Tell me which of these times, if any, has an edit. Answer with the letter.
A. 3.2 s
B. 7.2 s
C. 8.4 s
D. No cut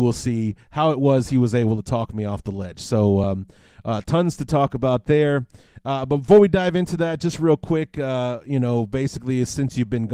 D